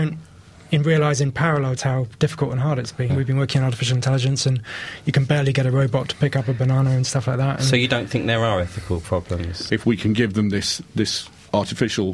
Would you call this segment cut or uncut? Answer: cut